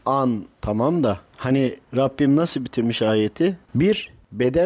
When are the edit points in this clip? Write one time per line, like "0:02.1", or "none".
0:03.7